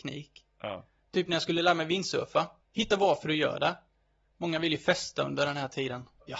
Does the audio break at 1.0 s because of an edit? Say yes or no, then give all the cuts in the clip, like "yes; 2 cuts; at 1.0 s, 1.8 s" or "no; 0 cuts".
no; 1 cut; at 2.6 s